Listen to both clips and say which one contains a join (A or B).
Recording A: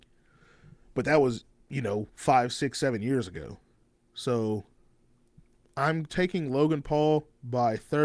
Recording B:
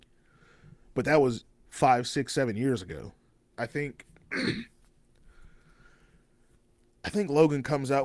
B